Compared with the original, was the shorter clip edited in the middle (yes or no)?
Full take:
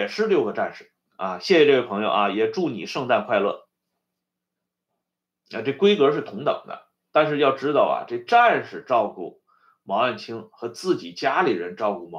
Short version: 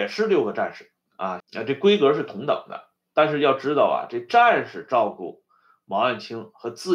yes